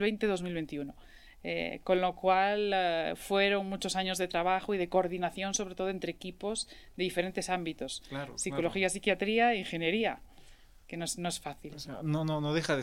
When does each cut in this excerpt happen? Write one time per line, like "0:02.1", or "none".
none

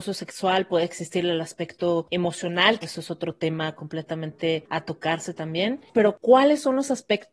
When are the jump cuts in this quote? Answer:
0:02.8

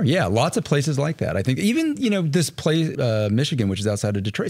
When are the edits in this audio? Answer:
0:02.9

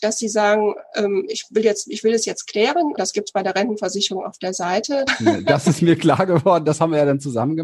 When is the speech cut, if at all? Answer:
0:03.0
0:05.1

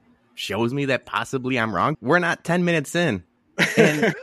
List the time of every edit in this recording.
0:01.9

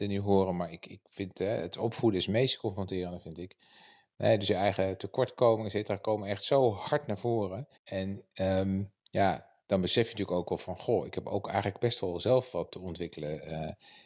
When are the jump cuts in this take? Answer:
0:07.8
0:12.7

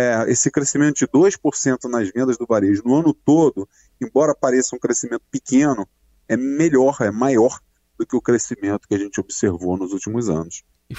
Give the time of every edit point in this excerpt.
none

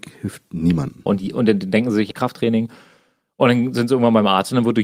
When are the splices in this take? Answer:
0:01.1
0:02.1

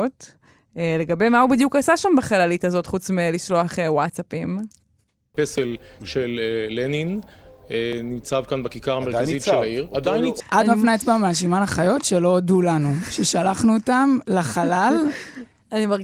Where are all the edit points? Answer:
0:10.4

